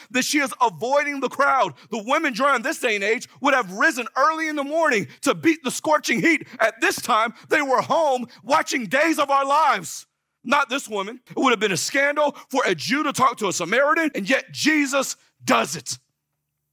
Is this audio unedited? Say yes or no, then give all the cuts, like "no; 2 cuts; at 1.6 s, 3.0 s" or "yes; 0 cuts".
no; 2 cuts; at 11.3 s, 14.1 s